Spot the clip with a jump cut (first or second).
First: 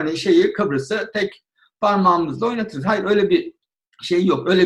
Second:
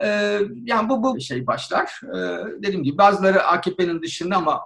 second